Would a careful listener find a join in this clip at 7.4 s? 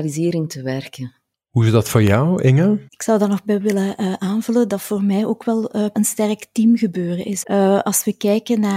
yes; 3 cuts; at 2.9 s, 5.9 s, 7.4 s

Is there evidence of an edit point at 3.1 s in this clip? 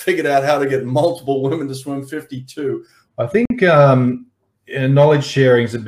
yes; 1 cut; at 3.1 s

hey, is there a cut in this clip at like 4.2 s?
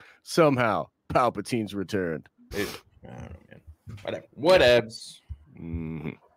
yes; 2 cuts; at 2.5 s, 4.2 s

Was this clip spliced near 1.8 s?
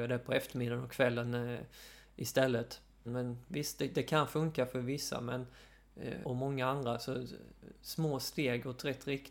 no; 2 cuts; at 3.1 s, 6.2 s

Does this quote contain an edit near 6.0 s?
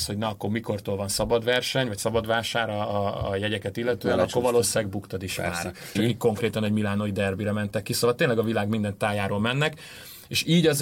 yes; 1 cut; at 6.0 s

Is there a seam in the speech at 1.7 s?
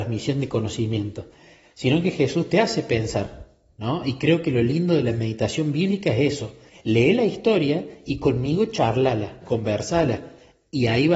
no; 2 cuts; at 6.7 s, 9.4 s

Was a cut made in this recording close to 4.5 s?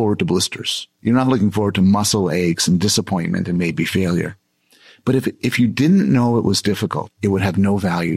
no; 1 cut; at 7.1 s

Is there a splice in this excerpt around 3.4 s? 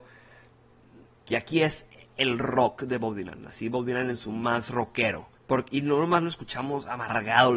no; 2 cuts; at 1.3 s, 5.4 s

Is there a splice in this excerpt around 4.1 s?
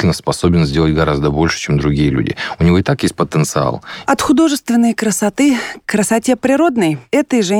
yes; 1 cut; at 4.1 s

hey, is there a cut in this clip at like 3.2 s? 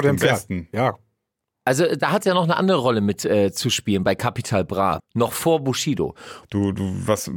no; 2 cuts; at 5.0 s, 6.4 s

